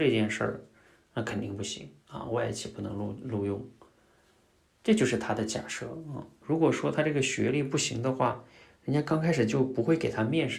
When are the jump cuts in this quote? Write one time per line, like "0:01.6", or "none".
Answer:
0:06.4